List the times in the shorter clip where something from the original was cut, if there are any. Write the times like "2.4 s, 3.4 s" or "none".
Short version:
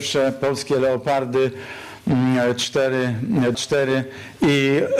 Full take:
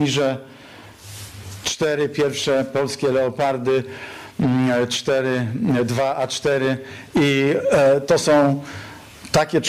3.5 s